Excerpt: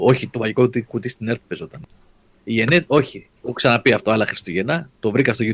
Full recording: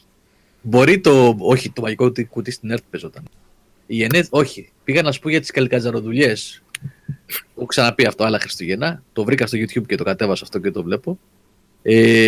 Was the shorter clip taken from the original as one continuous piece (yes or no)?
no